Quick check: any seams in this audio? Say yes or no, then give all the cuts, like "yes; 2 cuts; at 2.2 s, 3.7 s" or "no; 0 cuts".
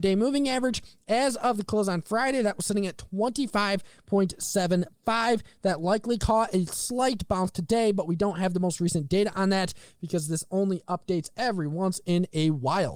no; 0 cuts